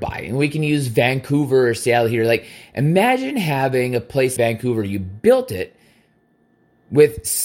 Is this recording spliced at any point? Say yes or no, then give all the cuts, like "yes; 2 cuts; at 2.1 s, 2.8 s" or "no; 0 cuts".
yes; 1 cut; at 4.4 s